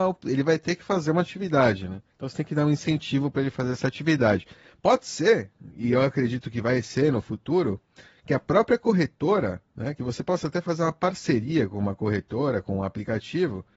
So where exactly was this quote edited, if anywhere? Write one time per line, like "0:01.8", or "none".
0:02.1